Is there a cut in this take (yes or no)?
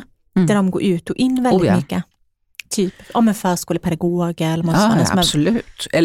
no